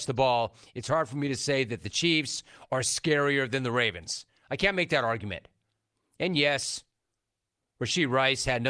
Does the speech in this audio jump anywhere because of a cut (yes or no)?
no